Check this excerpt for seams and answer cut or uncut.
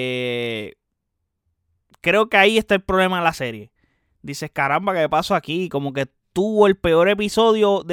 uncut